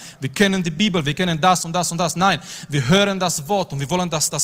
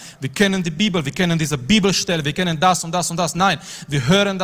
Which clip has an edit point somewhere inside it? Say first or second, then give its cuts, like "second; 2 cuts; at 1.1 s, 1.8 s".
first; 1 cut; at 1.0 s